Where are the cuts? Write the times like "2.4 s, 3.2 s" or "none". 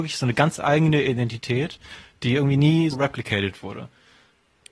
2.9 s